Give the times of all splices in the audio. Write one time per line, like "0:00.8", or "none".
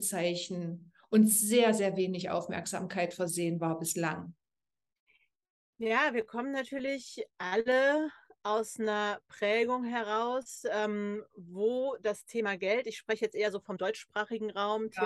none